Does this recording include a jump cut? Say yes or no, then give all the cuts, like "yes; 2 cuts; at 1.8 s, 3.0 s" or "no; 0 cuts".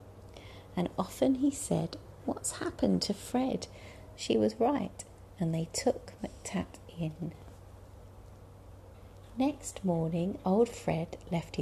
yes; 1 cut; at 4.2 s